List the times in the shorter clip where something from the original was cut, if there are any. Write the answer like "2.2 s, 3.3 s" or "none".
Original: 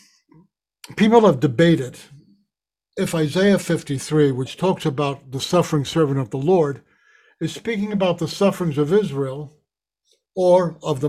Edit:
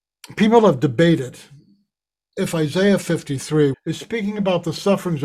3.7 s